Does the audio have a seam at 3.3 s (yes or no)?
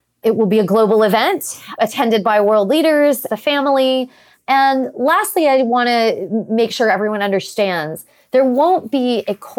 yes